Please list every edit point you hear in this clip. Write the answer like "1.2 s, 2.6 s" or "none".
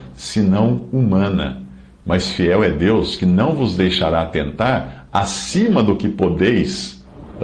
none